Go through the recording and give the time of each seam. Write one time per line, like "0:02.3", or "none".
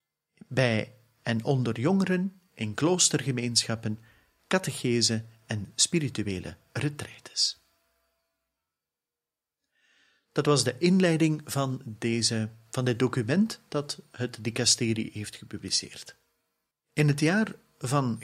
0:16.7

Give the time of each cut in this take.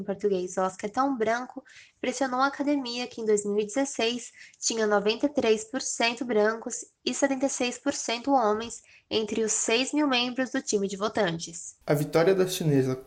0:11.8

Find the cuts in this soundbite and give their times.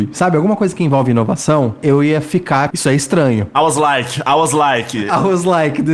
0:02.7

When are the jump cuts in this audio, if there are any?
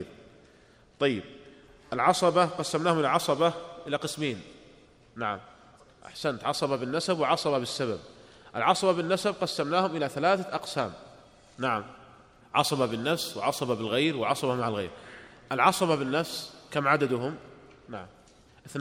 none

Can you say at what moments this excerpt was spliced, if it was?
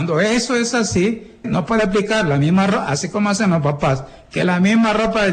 0:01.4

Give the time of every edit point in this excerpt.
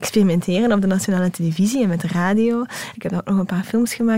0:02.9

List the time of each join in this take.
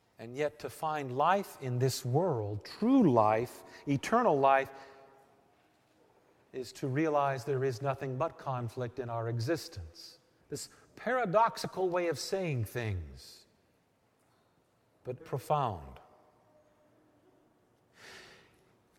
0:10.4
0:15.2

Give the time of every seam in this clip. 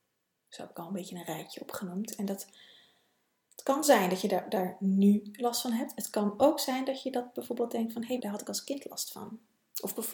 0:08.2

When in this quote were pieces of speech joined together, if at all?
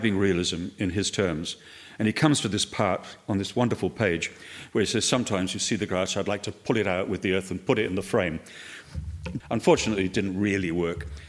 0:09.4

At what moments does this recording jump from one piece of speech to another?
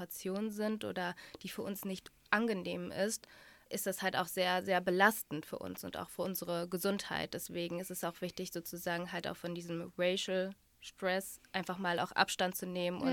0:03.7

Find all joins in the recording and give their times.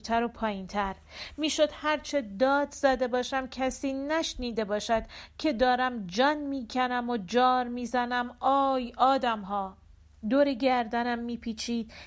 0:10.2

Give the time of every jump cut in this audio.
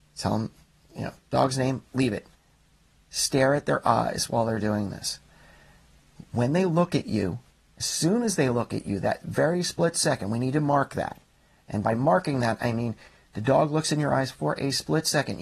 none

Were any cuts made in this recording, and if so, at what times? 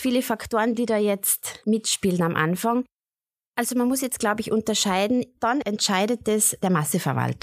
0:05.4

